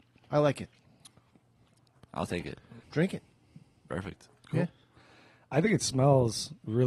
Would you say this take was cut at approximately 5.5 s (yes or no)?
no